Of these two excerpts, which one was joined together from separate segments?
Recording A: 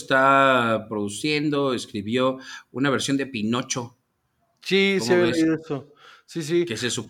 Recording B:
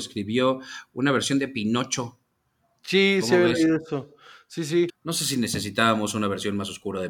B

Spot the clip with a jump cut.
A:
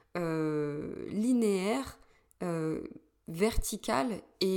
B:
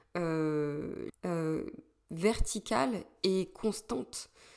B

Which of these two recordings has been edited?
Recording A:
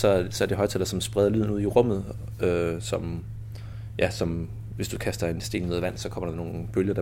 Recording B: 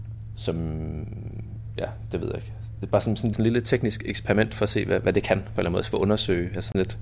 B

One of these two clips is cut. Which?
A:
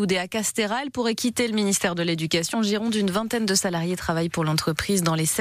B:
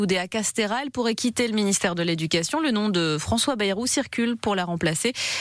A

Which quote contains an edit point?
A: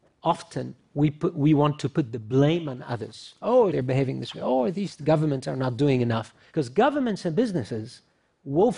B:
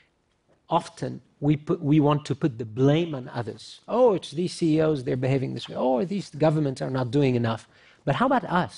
A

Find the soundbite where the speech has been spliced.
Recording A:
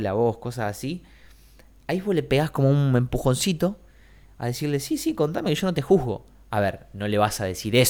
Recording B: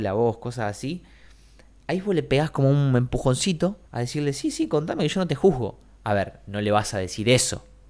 B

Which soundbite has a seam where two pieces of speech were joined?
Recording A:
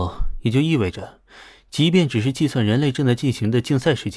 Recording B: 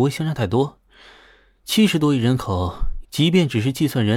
B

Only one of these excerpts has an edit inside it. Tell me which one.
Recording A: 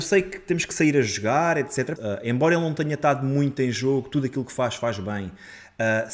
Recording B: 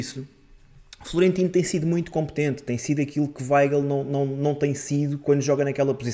A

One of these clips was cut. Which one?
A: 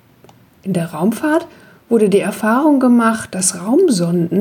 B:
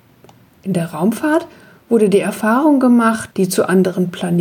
B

